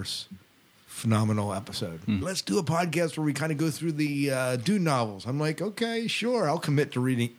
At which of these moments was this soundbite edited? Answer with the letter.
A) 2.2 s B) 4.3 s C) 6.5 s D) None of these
A